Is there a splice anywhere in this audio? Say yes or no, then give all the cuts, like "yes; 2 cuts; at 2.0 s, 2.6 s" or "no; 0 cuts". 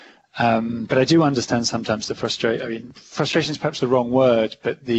no; 0 cuts